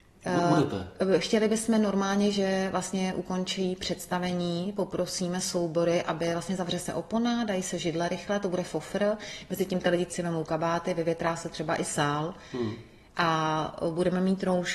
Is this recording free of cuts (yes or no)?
no